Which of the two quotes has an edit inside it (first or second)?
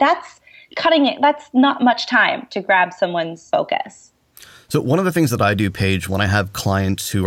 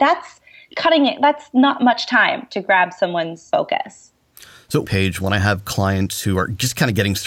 second